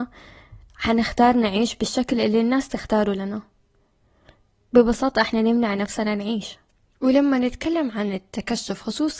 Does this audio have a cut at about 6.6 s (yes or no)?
no